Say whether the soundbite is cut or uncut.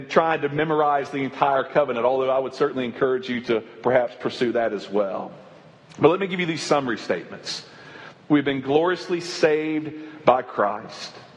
cut